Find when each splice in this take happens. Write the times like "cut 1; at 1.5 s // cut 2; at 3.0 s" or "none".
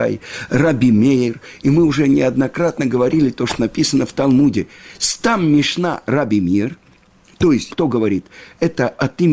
cut 1; at 7.7 s